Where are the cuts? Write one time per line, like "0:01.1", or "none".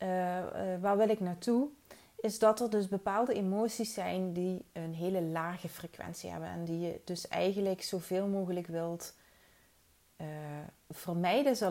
none